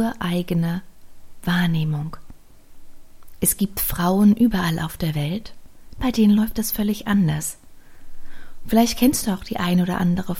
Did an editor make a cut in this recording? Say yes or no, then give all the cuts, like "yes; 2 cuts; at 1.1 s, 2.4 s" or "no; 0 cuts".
no; 0 cuts